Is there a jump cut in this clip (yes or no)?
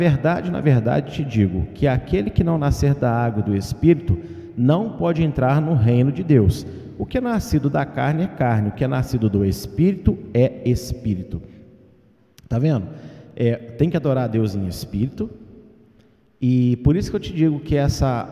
no